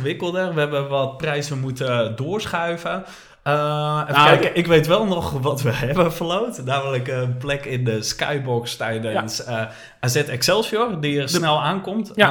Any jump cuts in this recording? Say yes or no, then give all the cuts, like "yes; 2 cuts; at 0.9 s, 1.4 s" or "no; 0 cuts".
no; 0 cuts